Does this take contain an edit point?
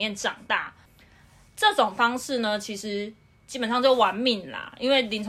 no; 0 cuts

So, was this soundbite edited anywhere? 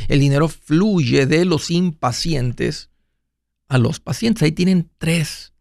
no; 0 cuts

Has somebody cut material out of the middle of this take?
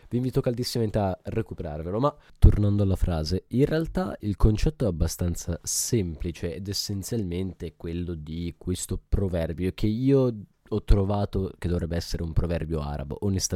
no; 0 cuts

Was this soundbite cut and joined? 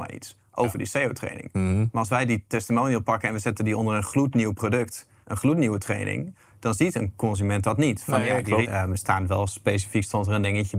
yes; 2 cuts; at 5.2 s, 8.6 s

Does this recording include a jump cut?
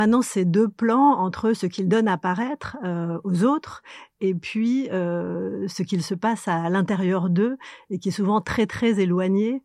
no; 0 cuts

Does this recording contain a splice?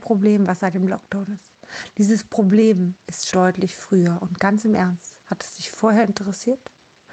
yes; 1 cut; at 3.3 s

